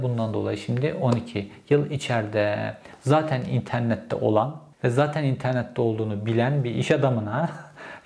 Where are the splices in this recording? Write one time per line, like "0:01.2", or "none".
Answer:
0:04.7

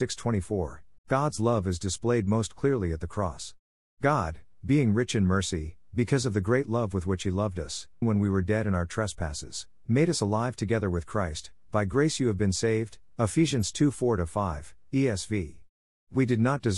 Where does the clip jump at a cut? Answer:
0:01.0
0:08.0

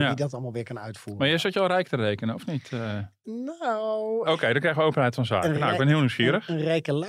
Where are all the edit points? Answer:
0:04.3

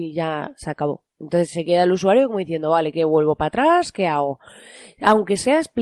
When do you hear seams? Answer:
0:01.1

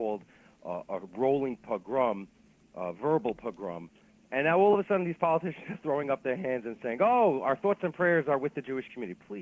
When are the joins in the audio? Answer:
0:04.2

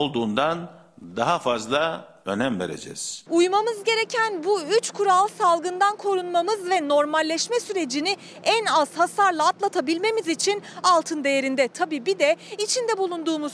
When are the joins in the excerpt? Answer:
none

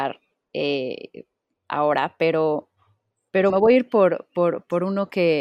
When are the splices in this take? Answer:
0:03.5

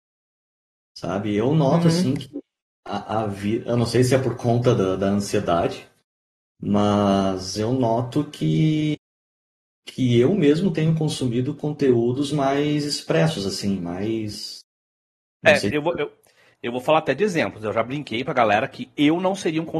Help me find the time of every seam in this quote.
none

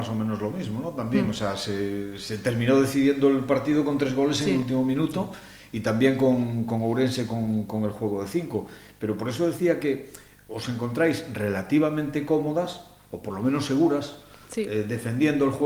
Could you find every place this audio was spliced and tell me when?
none

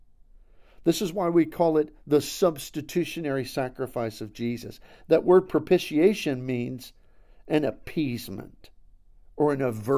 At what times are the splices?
0:05.0

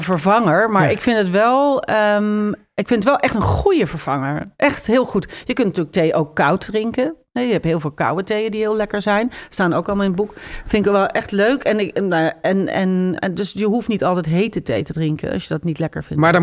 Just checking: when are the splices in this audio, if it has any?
0:13.2

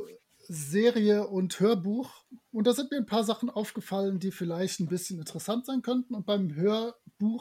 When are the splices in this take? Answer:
none

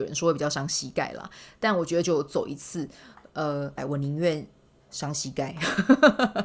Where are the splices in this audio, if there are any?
0:02.0
0:03.8

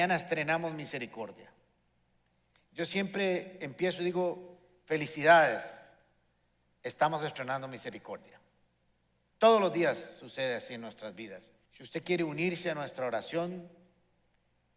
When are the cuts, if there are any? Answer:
0:02.5
0:11.7

